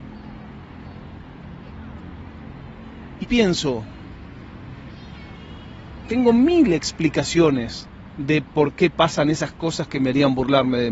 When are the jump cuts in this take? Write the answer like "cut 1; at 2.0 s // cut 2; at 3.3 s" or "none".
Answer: cut 1; at 3.2 s // cut 2; at 6.0 s